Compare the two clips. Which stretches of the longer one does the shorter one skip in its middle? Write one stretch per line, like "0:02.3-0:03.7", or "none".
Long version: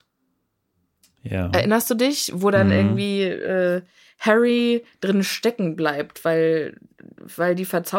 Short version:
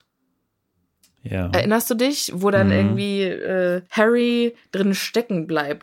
0:03.9-0:04.1